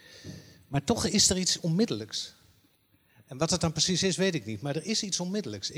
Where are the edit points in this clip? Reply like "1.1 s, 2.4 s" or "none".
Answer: none